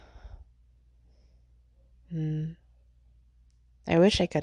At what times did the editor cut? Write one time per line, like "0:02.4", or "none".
none